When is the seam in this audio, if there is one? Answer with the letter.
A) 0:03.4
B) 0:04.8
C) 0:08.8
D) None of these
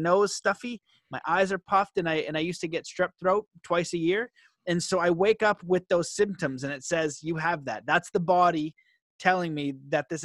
D